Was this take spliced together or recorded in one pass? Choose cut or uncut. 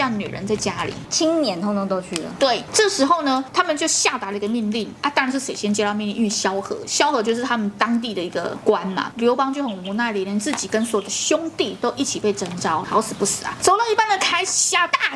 cut